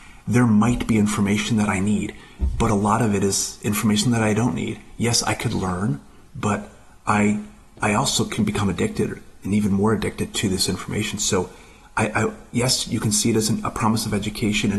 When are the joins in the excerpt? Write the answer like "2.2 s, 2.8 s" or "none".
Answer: none